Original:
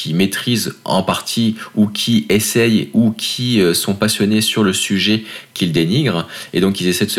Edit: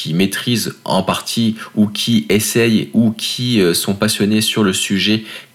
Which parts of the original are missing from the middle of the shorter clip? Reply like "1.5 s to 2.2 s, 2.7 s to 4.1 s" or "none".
none

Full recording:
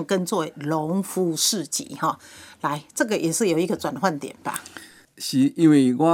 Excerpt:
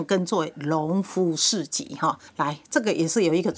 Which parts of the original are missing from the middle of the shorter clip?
2.3 s to 2.5 s

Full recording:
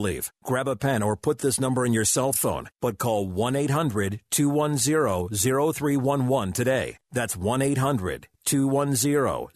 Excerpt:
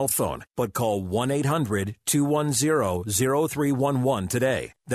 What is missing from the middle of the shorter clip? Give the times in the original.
none

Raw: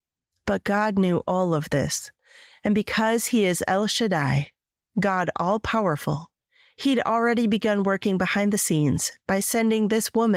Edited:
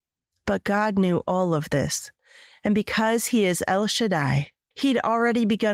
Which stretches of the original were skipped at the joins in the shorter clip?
4.7 s to 6.7 s

